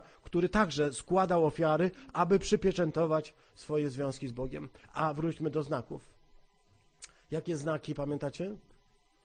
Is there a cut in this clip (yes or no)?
no